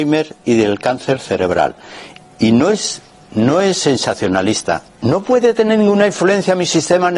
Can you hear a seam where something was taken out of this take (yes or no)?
yes